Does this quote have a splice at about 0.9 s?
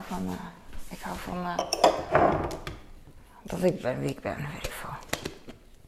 no; 0 cuts

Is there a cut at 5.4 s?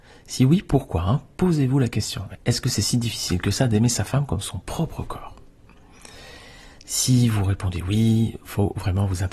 no; 0 cuts

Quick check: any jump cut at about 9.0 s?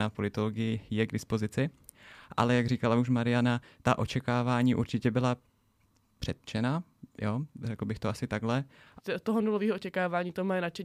yes; 1 cut; at 9.0 s

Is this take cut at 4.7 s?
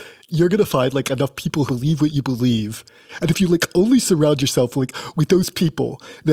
no; 1 cut; at 1.7 s

